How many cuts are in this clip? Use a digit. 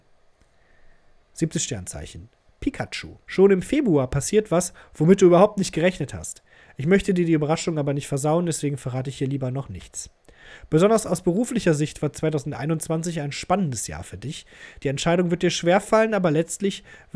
2